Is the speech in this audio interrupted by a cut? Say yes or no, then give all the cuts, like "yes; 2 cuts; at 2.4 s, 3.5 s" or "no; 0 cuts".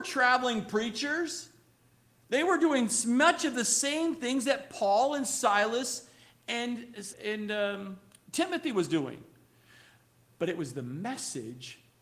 yes; 1 cut; at 7.1 s